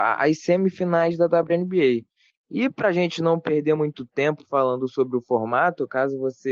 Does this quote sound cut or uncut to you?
uncut